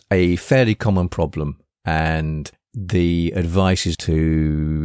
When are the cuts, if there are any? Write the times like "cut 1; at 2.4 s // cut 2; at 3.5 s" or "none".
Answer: cut 1; at 3.9 s